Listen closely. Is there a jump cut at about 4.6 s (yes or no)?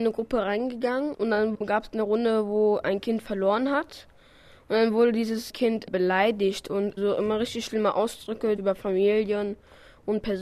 no